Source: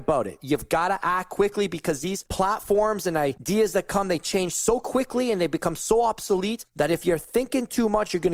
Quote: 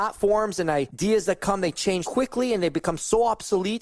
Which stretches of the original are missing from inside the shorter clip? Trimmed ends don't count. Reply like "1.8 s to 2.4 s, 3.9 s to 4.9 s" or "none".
4.5 s to 4.8 s